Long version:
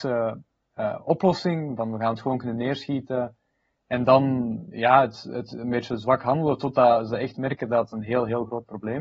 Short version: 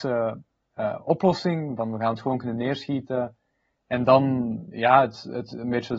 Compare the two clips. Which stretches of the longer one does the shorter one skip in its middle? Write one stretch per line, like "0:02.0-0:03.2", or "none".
none

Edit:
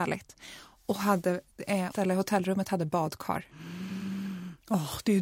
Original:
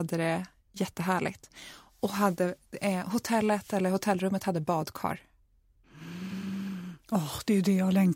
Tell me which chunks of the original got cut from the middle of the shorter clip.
0:03.0-0:03.7
0:05.3-0:05.9

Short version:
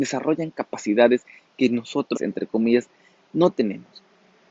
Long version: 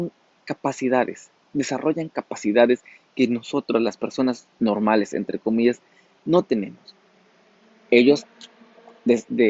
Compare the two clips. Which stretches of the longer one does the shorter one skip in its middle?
0:03.7-0:05.1

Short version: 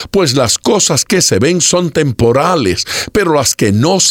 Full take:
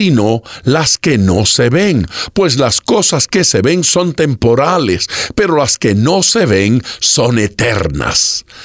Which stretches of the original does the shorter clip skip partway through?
none

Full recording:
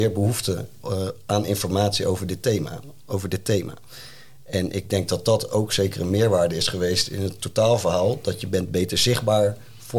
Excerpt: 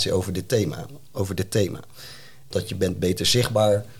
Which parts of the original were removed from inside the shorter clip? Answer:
0:04.4-0:08.2

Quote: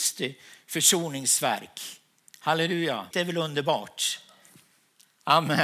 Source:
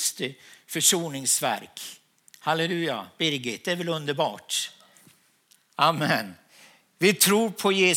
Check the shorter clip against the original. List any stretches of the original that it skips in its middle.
0:03.1-0:03.6

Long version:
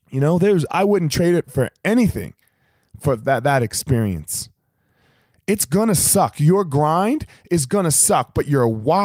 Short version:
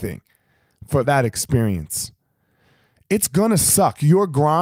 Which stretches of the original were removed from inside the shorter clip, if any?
0:03.2-0:03.4

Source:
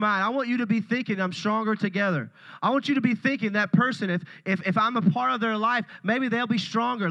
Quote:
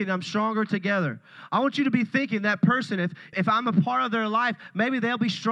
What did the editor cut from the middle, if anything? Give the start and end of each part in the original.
0:04.4-0:04.6

